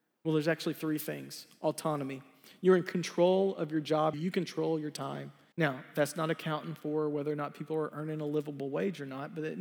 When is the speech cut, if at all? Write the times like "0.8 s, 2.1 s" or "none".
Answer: 4.1 s, 5.5 s